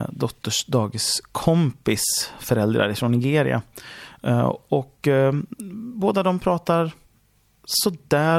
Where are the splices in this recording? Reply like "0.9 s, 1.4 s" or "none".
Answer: none

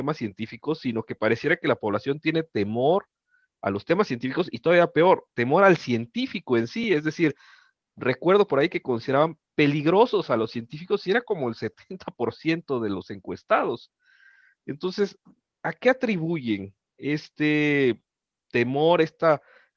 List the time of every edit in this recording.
none

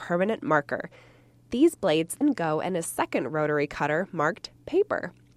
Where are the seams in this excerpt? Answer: 2.2 s

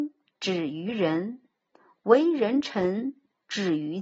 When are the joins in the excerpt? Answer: none

